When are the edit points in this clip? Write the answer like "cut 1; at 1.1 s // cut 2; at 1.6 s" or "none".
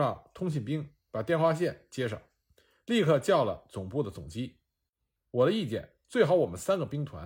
cut 1; at 5.2 s